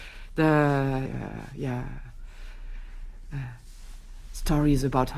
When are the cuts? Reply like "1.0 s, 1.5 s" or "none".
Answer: 1.1 s